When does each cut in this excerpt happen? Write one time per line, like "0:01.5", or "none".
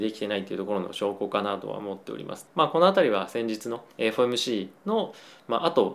0:02.5
0:03.9